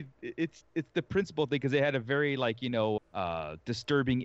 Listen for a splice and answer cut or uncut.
cut